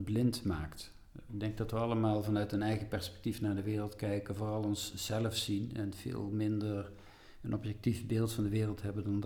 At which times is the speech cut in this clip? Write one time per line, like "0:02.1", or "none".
none